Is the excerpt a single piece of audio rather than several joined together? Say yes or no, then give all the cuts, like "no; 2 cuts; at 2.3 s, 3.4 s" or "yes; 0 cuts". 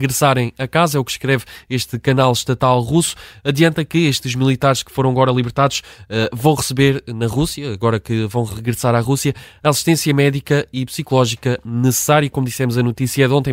yes; 0 cuts